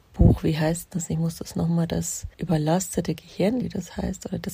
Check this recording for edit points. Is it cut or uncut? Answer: cut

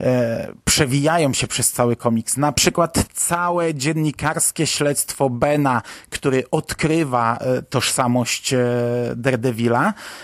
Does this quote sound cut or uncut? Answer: uncut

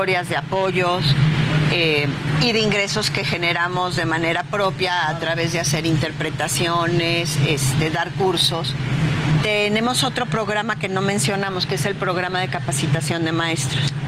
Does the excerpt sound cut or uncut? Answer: uncut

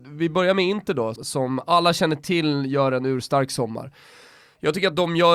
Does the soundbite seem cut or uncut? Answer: cut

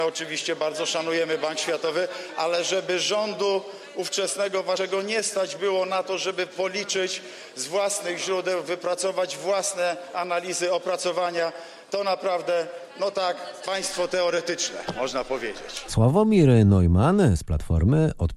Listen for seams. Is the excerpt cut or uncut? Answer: cut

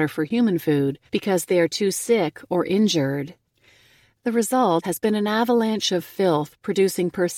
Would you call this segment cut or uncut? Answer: cut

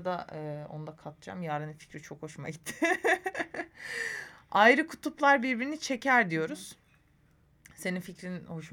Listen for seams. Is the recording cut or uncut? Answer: uncut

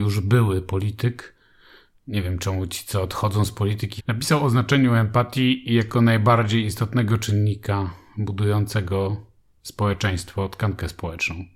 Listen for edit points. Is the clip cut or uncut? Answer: cut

